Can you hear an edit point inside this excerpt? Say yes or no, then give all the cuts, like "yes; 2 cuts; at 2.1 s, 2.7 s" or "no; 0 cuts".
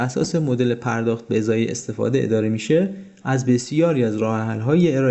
no; 0 cuts